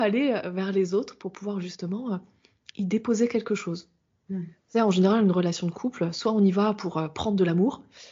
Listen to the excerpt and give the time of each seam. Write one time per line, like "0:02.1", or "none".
none